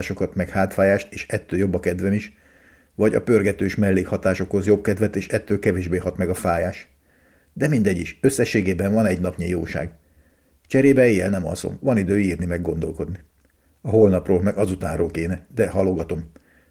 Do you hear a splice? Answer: no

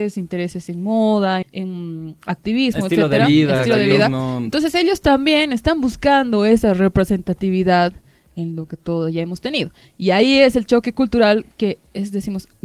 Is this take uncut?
no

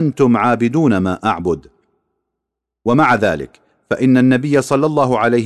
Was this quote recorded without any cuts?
yes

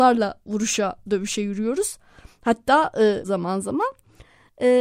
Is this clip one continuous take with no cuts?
no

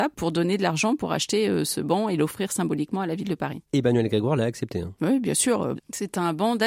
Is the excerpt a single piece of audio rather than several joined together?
no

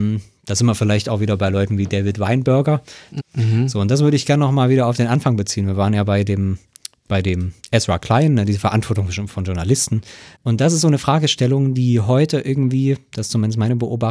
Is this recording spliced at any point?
yes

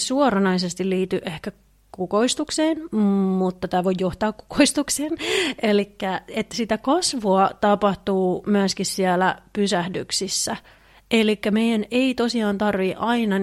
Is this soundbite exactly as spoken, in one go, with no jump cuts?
yes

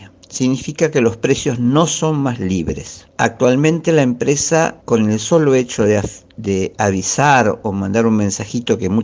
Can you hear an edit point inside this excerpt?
no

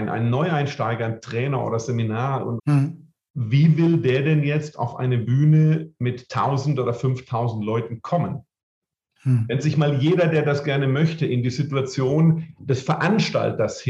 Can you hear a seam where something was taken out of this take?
yes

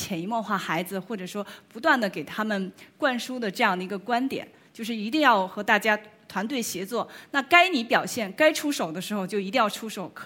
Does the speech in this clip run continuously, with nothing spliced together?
yes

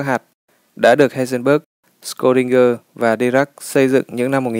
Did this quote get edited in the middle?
no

